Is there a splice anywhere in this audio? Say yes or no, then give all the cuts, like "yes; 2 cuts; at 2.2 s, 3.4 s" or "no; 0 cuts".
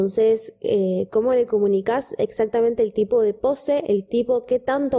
no; 0 cuts